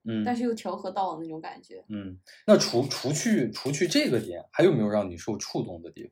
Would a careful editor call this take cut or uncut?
uncut